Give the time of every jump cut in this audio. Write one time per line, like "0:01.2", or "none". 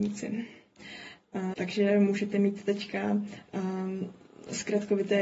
0:01.5